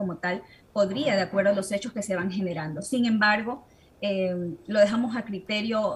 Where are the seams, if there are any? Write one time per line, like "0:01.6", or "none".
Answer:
none